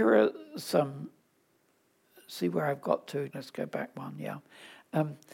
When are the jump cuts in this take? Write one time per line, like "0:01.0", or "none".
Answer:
0:03.3